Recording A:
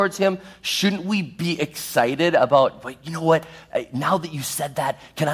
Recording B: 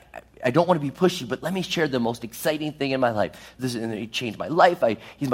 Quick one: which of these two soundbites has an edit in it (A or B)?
B